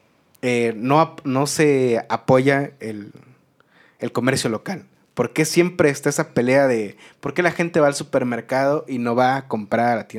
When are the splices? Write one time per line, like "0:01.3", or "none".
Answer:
none

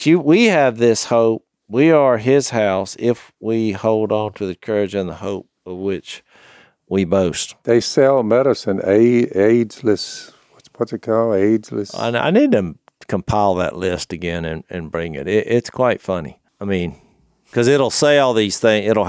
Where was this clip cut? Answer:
0:16.5

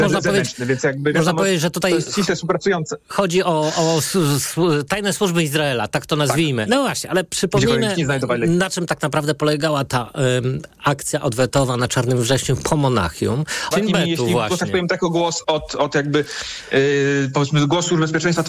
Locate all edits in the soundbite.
0:06.7
0:13.7
0:15.4

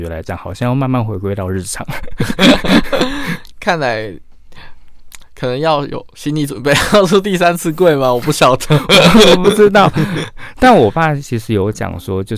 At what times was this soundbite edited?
none

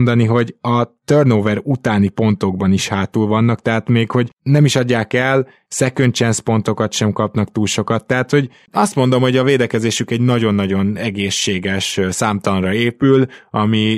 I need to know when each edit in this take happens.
0:05.7

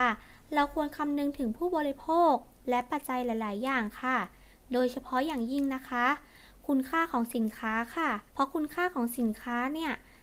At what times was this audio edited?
0:03.0
0:08.3

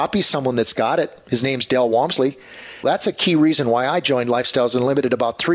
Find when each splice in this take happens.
0:02.8

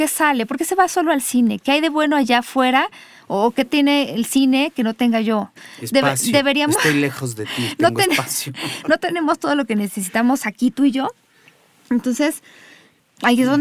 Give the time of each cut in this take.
none

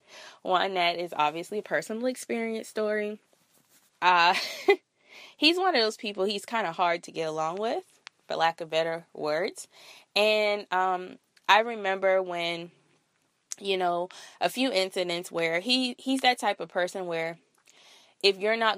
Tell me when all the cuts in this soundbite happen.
0:03.9

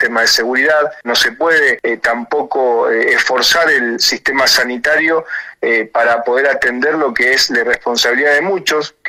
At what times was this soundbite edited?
0:01.0

